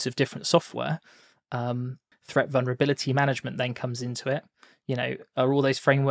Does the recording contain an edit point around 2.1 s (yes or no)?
yes